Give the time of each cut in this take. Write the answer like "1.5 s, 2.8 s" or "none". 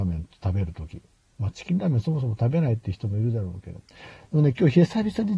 none